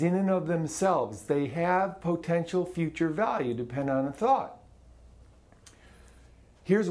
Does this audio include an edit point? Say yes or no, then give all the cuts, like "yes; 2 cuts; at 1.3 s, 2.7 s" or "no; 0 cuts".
no; 0 cuts